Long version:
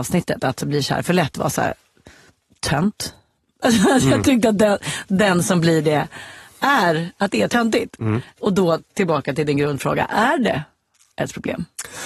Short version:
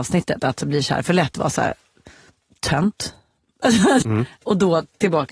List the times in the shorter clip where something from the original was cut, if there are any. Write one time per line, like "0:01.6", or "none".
0:04.0